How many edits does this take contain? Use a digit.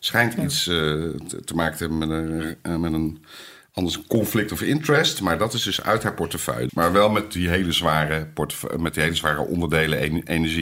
1